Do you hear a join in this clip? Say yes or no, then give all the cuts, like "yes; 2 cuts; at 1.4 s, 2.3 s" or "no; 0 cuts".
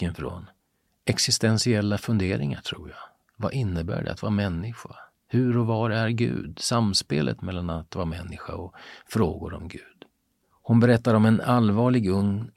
no; 0 cuts